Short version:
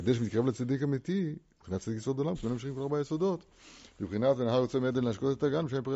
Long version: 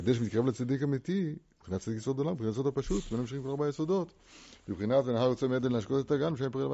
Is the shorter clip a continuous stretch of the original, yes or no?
no